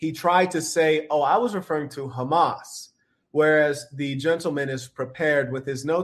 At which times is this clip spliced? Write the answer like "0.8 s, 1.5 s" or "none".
none